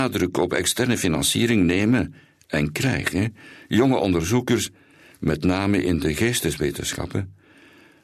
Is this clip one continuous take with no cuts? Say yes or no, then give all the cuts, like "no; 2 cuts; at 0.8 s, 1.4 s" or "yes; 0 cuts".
yes; 0 cuts